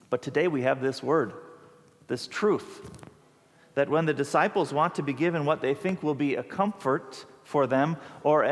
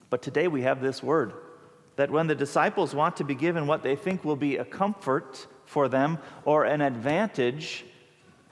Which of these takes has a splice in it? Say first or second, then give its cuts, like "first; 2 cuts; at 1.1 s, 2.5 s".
second; 1 cut; at 1.9 s